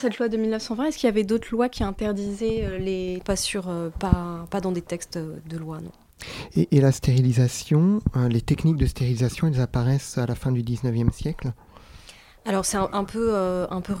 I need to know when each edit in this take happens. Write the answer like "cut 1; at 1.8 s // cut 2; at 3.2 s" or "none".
cut 1; at 3.2 s